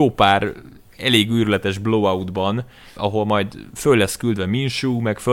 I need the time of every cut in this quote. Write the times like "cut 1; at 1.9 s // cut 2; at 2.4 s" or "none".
cut 1; at 3.0 s

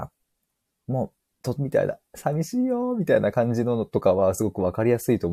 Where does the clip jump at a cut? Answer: cut 1; at 1.6 s

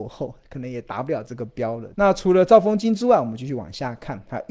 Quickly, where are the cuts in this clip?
cut 1; at 1.9 s

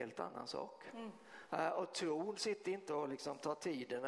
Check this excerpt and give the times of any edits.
cut 1; at 1.5 s

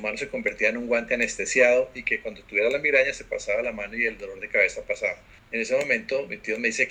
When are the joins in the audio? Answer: cut 1; at 5.4 s

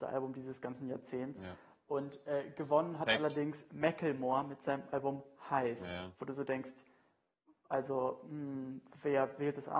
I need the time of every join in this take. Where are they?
none

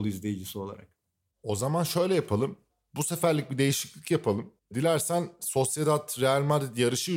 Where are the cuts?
cut 1; at 4.6 s

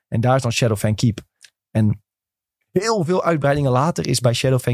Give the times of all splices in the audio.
none

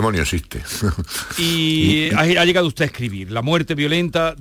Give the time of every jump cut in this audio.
none

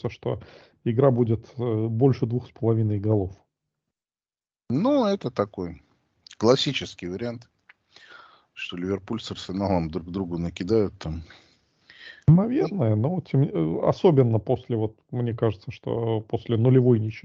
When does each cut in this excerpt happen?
none

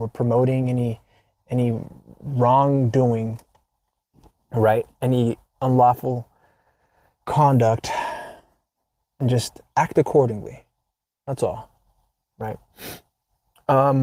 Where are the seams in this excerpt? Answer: none

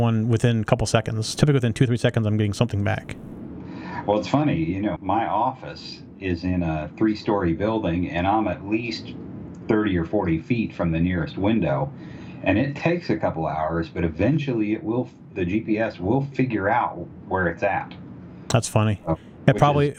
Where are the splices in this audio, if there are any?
cut 1; at 5.0 s

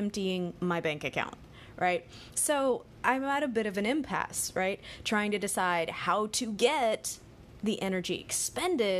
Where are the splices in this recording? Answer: cut 1; at 2.3 s

